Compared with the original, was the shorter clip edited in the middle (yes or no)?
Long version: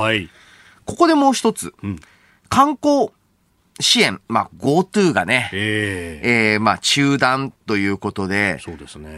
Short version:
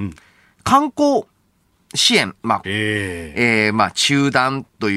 yes